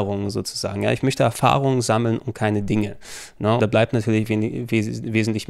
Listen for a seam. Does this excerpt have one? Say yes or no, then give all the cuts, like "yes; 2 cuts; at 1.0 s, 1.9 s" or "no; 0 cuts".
yes; 1 cut; at 3.6 s